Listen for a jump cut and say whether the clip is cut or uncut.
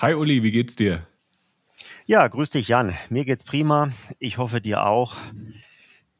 uncut